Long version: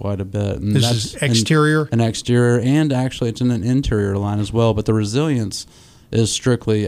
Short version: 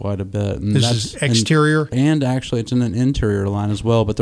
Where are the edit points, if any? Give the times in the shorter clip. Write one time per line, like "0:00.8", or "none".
0:01.9